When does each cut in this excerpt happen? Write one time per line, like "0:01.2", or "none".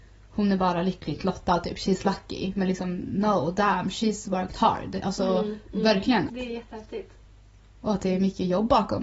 0:06.3